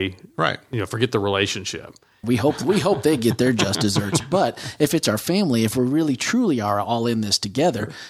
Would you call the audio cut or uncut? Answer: cut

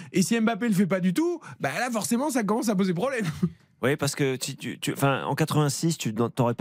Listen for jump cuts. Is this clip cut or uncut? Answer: uncut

